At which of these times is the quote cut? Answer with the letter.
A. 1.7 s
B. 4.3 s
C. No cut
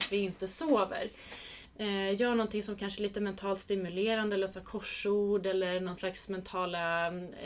A